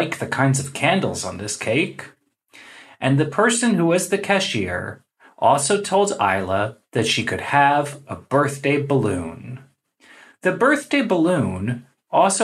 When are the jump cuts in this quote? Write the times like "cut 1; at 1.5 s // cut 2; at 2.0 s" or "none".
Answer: none